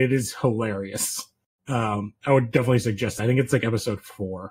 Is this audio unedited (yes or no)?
yes